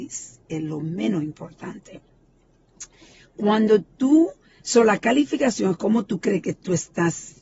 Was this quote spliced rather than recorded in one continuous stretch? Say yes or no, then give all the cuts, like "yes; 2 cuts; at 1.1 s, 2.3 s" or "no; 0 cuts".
no; 0 cuts